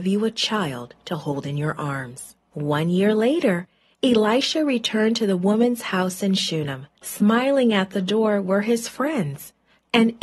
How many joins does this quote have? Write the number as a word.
two